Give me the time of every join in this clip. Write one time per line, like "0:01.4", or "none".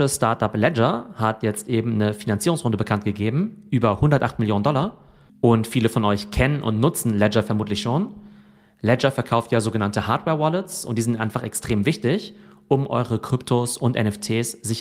none

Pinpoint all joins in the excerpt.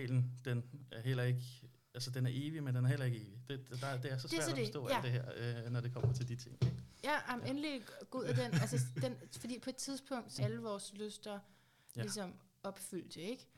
0:10.4

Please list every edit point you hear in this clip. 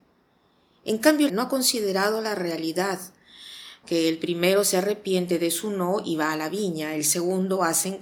0:01.3
0:03.8

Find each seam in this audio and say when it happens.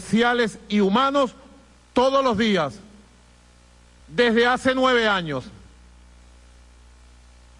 0:04.0

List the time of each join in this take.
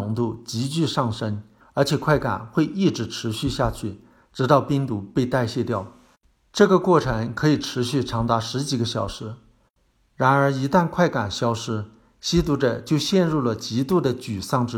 0:01.6

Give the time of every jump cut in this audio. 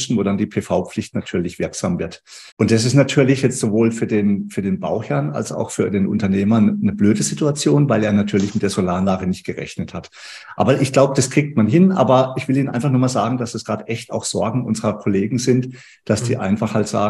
0:02.5

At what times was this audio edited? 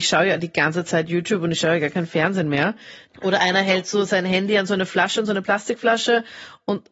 0:03.1

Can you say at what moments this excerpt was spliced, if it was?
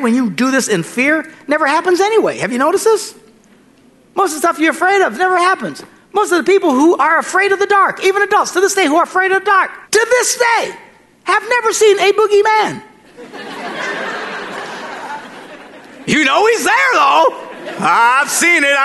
0:09.8

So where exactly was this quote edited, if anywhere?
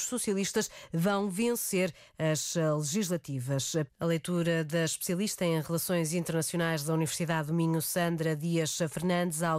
0:03.9

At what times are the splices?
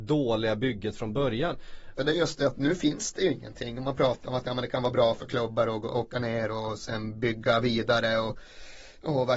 none

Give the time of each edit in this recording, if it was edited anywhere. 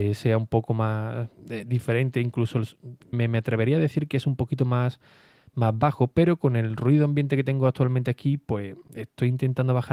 0:03.1

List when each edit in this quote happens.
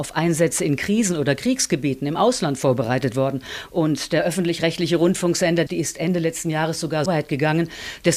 0:03.7
0:05.7
0:07.1

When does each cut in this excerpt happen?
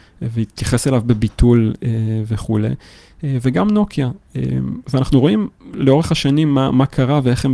none

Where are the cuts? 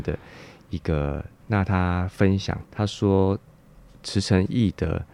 0:01.4
0:02.7

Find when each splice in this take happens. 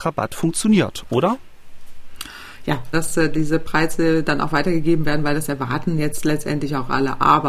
0:02.9

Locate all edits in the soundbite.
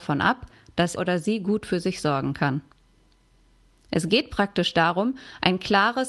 0:01.0

